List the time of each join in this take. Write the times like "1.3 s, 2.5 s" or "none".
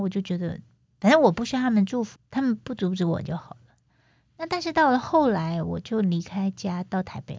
2.2 s